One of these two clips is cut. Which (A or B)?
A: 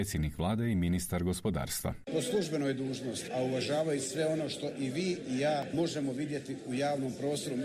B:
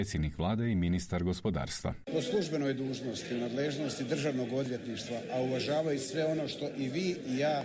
A